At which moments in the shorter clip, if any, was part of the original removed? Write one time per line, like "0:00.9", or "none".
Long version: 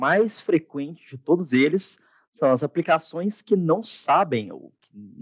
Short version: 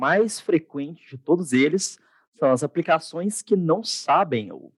none

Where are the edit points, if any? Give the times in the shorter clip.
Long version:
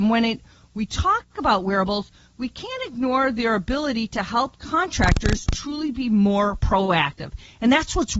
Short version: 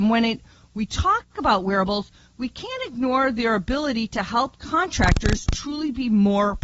none

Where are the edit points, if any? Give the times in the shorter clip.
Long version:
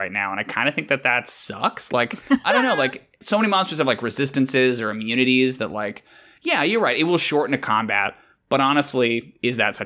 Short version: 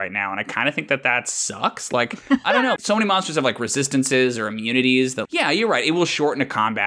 0:02.8
0:05.2

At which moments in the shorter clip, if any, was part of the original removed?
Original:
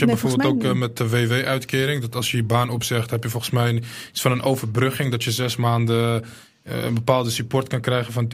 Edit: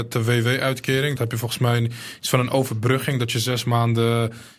0:01.2

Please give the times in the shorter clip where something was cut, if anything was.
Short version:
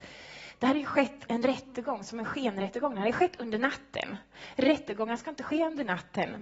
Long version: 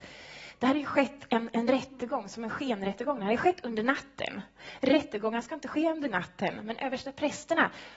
0:01.3

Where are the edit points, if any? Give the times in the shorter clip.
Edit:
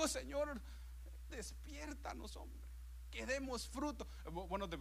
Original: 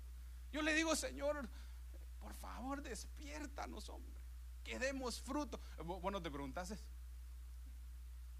0:01.3

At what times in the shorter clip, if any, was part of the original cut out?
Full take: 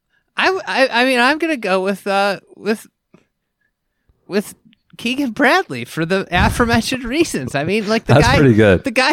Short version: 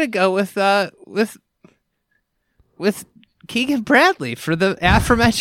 none

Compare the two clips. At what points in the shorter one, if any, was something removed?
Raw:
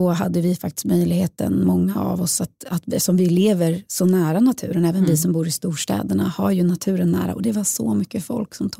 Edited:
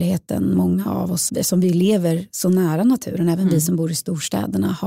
0:01.3

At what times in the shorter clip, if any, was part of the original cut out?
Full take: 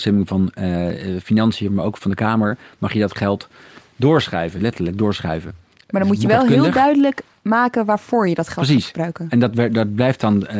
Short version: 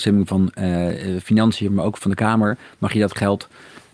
none

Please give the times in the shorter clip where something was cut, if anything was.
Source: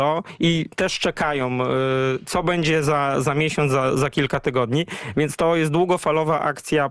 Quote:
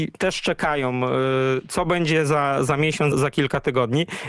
0:03.1

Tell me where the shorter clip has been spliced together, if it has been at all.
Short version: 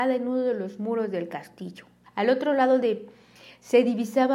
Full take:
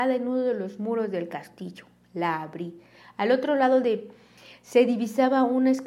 0:02.0

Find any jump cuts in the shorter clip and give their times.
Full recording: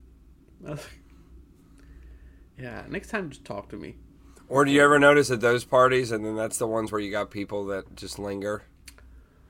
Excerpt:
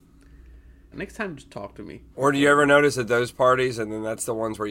0:00.9
0:02.1

